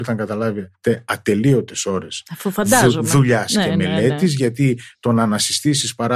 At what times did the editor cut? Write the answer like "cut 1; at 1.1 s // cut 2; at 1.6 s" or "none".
none